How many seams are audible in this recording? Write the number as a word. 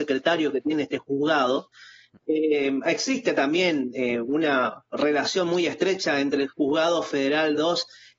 one